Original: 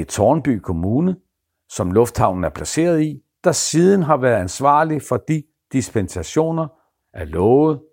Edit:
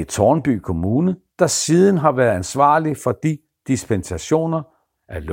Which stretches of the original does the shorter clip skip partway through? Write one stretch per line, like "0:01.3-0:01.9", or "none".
0:01.3-0:03.3